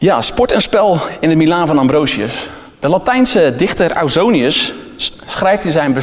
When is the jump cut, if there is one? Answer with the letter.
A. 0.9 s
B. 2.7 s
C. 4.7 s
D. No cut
D